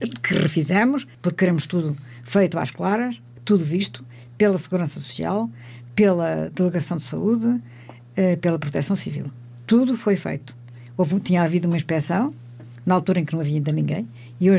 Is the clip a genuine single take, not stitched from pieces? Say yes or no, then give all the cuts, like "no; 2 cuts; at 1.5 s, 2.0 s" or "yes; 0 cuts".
yes; 0 cuts